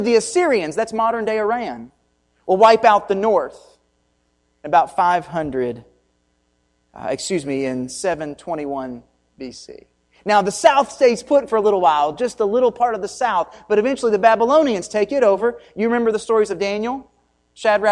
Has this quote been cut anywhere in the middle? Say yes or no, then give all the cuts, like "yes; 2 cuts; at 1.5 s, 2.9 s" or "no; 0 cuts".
no; 0 cuts